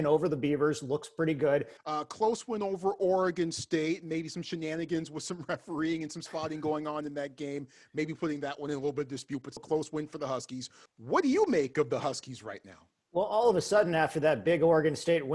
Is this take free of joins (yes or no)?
no